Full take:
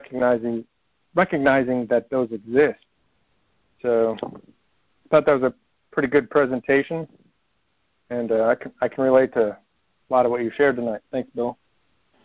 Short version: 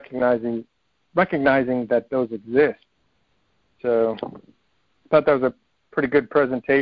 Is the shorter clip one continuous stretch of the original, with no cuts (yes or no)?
yes